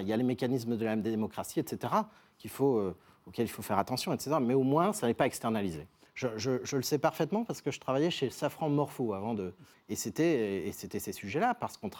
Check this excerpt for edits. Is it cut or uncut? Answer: cut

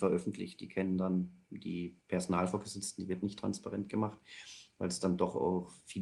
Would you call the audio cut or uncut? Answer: cut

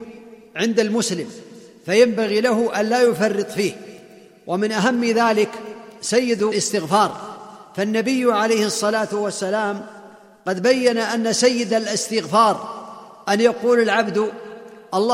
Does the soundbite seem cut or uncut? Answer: uncut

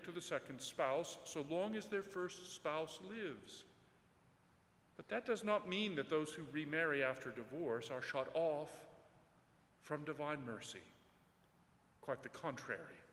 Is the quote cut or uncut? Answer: uncut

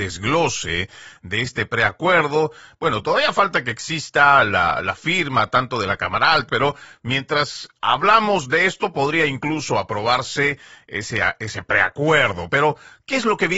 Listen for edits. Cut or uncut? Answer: cut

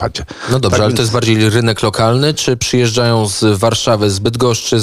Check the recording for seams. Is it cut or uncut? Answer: uncut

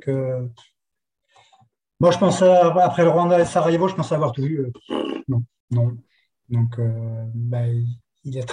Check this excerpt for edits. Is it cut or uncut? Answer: cut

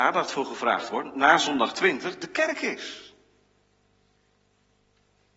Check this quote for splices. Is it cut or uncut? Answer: uncut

